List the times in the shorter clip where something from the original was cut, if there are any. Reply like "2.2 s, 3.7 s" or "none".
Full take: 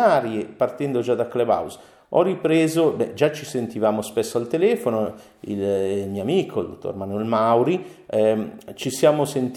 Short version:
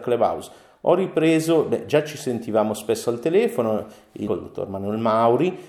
4.3 s